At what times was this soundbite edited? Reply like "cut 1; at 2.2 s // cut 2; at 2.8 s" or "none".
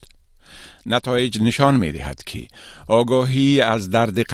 none